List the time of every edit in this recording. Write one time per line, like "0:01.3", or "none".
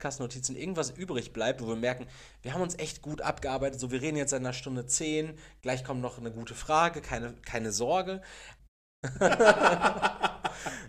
0:08.6